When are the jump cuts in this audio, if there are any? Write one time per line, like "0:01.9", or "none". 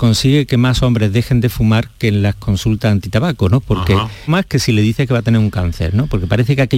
0:04.3